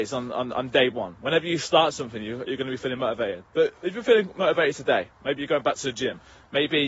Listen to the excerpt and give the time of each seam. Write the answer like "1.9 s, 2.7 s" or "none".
none